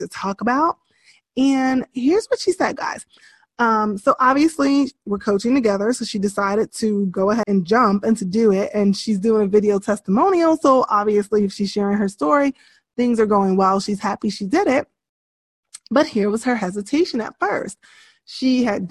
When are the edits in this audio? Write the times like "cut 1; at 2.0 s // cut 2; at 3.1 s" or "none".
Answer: cut 1; at 7.4 s